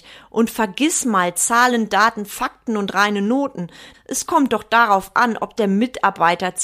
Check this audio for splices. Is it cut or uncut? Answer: cut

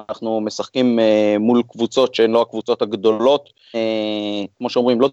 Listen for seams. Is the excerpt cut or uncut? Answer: cut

